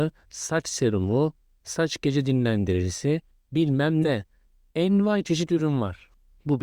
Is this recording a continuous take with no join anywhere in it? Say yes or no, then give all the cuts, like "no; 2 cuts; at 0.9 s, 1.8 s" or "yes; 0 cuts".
yes; 0 cuts